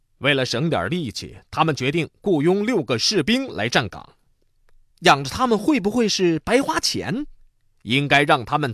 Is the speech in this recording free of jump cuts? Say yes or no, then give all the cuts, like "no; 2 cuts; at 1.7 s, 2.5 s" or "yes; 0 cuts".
no; 1 cut; at 4.9 s